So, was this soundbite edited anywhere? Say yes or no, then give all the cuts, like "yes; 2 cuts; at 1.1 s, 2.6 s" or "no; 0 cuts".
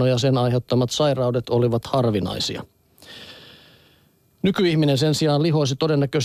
no; 0 cuts